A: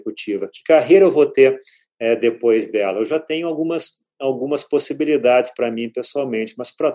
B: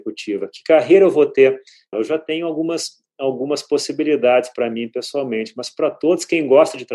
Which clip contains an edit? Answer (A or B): B